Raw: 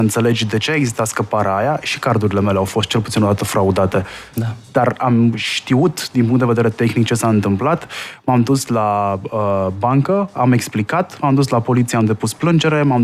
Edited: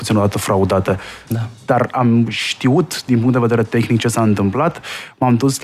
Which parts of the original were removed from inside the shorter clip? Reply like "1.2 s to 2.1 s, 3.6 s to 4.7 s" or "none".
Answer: none

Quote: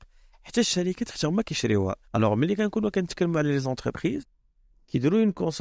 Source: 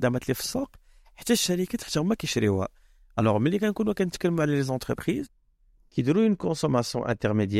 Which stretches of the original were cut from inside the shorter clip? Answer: 2.8 s to 3.1 s

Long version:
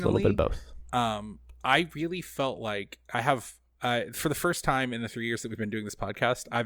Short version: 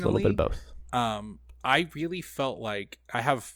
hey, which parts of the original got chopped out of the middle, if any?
none

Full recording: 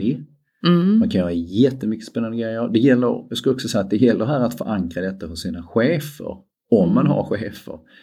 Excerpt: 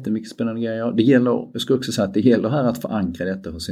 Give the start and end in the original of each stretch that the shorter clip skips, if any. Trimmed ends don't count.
none

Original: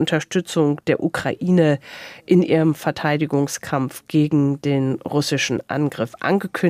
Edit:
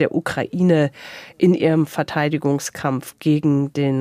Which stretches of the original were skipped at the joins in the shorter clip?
none

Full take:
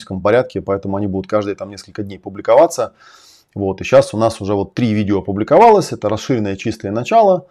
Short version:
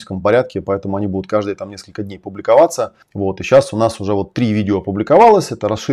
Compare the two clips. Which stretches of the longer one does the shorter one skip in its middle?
3.0 s to 3.4 s

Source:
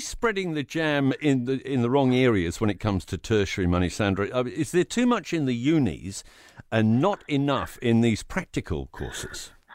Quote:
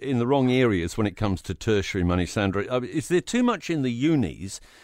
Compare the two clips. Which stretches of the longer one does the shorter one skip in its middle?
none

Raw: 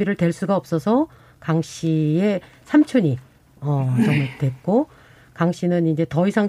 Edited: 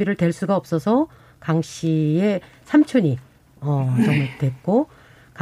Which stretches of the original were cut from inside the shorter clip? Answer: none

